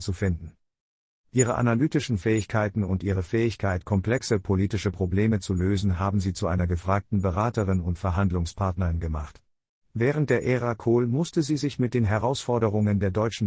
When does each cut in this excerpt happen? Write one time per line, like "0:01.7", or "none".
0:01.3
0:09.8